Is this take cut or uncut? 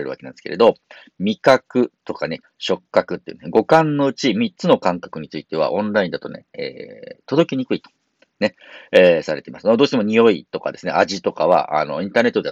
cut